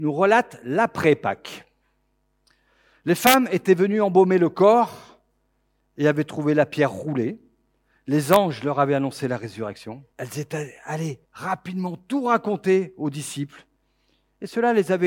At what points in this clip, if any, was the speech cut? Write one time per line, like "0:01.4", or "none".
0:10.1
0:11.2